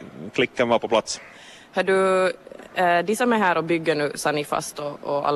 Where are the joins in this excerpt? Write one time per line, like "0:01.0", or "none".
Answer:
none